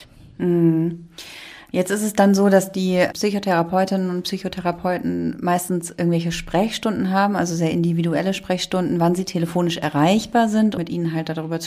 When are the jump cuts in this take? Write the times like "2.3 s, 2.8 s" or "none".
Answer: 10.8 s